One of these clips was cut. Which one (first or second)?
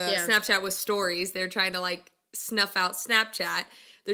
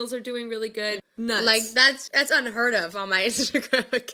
second